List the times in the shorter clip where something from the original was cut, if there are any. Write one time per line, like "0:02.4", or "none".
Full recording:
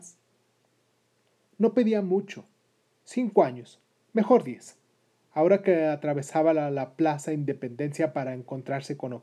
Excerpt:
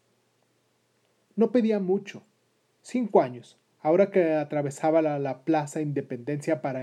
0:03.7